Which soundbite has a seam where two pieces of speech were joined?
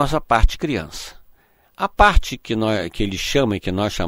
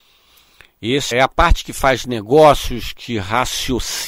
second; 1 cut; at 1.1 s

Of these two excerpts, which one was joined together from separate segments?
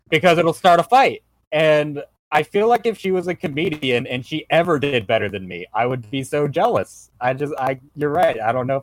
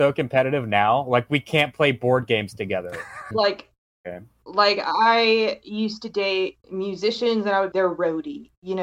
second; 3 cuts; at 3.3 s, 6.6 s, 7.7 s

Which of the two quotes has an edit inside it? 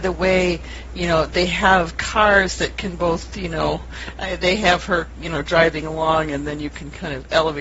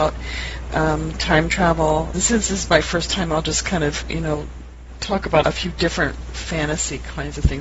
second; 2 cuts; at 2.1 s, 5.4 s

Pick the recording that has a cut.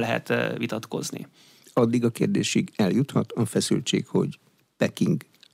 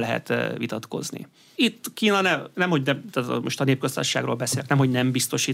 second; 1 cut; at 1.5 s

